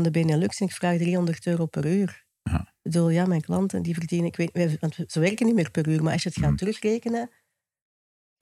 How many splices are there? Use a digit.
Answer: 0